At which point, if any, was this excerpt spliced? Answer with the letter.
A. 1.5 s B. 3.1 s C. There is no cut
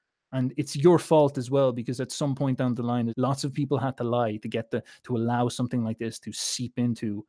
B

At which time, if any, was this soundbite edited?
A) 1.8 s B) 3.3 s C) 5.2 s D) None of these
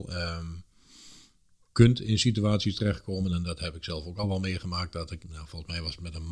C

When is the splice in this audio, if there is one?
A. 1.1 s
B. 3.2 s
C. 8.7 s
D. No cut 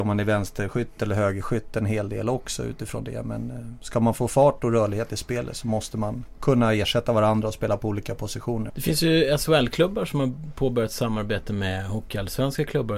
C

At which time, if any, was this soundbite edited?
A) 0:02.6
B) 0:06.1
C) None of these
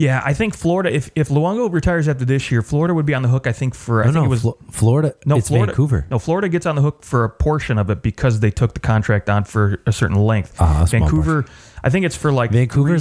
C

